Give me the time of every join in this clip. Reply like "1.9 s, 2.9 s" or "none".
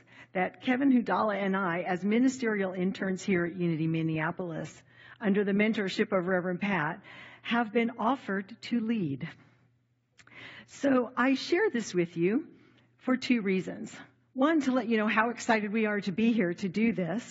none